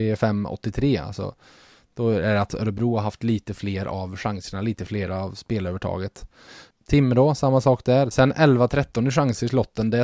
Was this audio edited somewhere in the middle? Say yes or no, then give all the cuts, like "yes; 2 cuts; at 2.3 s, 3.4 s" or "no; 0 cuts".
yes; 2 cuts; at 6.7 s, 8.1 s